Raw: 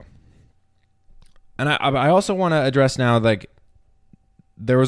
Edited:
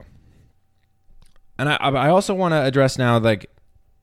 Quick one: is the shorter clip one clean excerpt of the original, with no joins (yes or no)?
yes